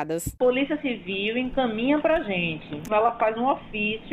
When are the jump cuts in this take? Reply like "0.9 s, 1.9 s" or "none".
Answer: 2.9 s